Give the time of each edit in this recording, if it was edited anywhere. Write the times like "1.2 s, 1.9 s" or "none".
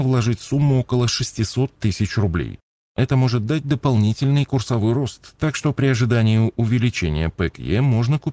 2.8 s